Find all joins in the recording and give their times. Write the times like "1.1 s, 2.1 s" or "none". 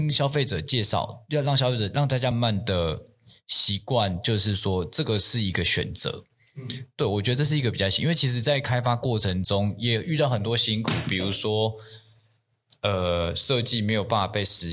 2.3 s